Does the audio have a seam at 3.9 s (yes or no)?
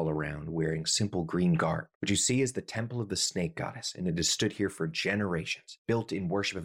no